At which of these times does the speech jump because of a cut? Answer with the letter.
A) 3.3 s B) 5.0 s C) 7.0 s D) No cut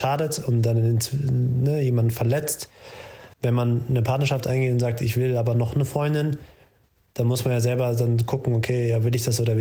A